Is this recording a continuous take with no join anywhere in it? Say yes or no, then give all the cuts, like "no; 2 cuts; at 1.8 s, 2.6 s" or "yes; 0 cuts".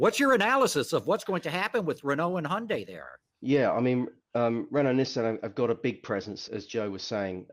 no; 1 cut; at 6.5 s